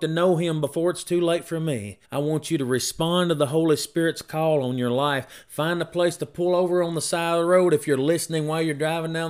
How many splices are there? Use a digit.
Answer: 1